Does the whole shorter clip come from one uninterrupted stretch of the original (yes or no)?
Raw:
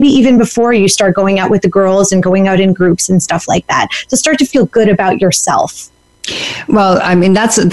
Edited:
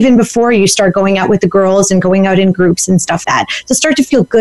no